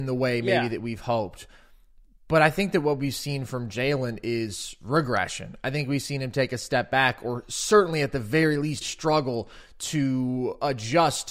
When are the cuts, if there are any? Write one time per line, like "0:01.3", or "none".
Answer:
0:08.8